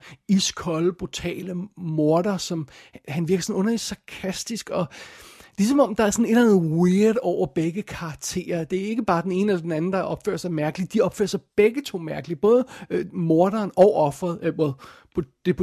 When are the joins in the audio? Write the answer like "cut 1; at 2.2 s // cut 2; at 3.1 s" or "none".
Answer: none